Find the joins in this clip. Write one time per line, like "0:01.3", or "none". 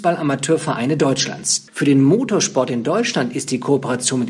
0:01.7